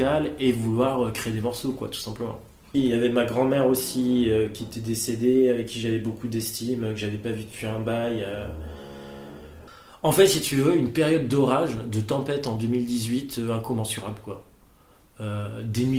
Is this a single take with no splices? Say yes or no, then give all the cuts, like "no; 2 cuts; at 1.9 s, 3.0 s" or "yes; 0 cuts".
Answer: yes; 0 cuts